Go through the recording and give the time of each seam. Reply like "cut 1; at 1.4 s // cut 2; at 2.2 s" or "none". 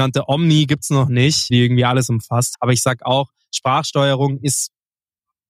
cut 1; at 1.5 s // cut 2; at 2.5 s